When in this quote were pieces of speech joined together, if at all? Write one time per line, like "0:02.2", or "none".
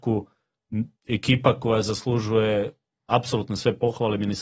0:01.0